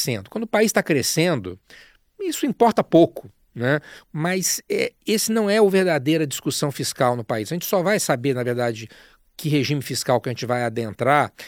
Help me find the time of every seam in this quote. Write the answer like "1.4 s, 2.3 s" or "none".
4.0 s